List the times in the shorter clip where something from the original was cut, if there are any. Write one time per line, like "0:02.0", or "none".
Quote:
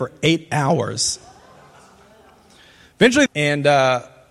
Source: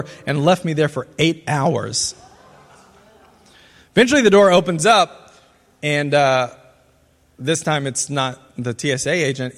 0:03.3

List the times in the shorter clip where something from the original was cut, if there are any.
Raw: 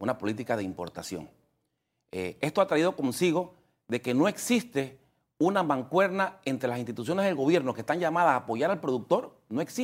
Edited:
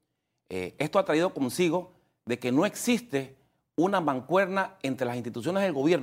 none

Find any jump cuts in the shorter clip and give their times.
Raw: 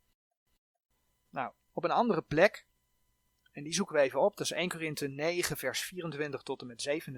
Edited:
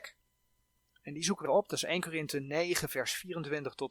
0:01.5

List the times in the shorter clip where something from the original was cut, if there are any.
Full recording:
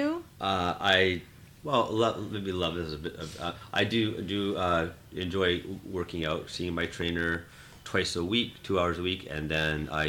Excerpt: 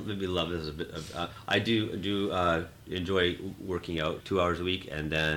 0:04.2

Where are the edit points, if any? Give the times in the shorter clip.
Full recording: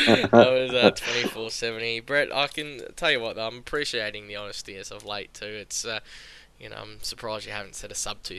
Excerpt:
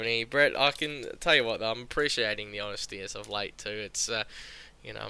none

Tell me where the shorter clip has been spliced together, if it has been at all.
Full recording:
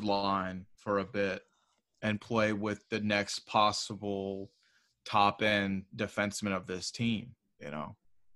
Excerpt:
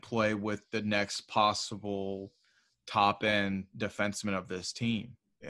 none

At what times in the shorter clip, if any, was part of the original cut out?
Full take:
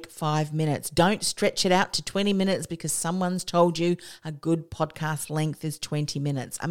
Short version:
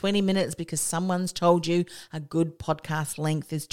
none

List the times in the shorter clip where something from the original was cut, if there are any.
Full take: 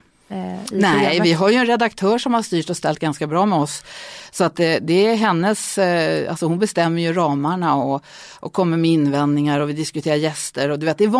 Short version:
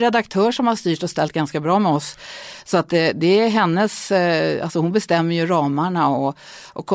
none

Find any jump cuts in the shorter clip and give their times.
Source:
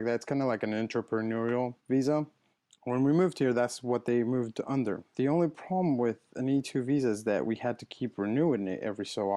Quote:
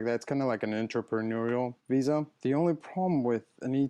0:02.4

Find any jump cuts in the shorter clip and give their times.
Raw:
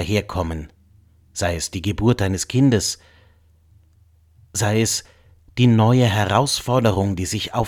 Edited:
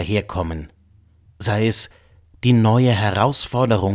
0:01.3

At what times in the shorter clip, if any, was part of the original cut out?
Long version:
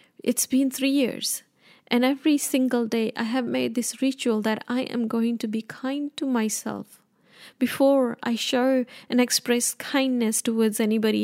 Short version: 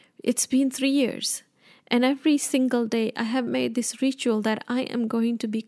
none

